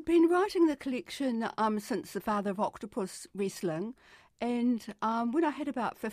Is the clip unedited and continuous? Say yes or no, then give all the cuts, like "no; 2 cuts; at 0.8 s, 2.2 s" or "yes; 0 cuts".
yes; 0 cuts